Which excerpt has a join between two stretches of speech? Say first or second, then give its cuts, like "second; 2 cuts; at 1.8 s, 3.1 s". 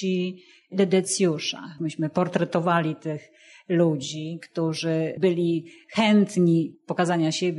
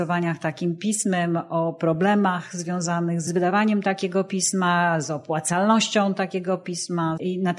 first; 1 cut; at 1.8 s